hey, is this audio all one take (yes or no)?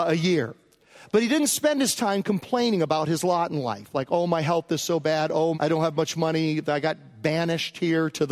no